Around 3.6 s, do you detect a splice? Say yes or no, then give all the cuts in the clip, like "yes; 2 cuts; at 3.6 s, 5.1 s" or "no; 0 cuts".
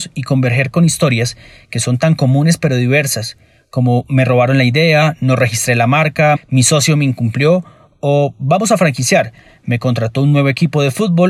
no; 1 cut; at 6.4 s